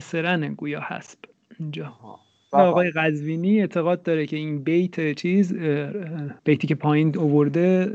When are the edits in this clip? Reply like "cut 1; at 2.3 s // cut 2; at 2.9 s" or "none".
cut 1; at 2.5 s // cut 2; at 6.4 s